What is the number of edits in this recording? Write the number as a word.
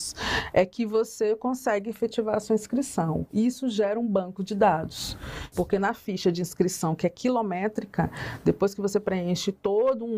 one